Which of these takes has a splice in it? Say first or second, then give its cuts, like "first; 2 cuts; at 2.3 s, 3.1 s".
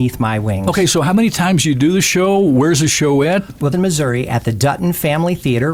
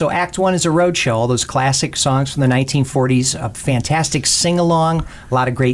first; 1 cut; at 3.7 s